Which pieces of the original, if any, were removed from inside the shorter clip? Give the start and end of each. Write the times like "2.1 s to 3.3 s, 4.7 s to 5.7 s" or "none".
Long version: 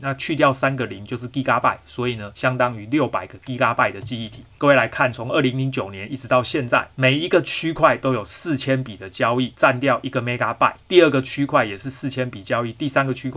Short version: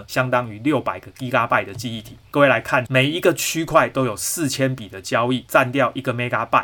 5.1 s to 6.9 s